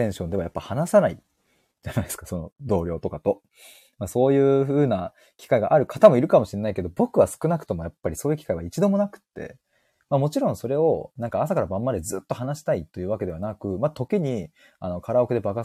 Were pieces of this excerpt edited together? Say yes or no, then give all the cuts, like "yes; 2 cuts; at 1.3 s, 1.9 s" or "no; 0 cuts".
yes; 1 cut; at 10.0 s